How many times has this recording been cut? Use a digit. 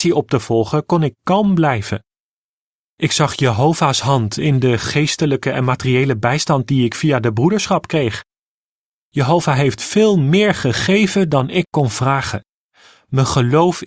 0